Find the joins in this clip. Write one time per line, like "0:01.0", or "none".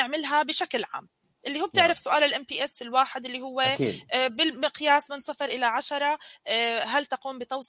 none